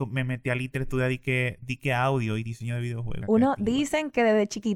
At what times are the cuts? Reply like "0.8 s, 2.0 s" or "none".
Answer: 3.2 s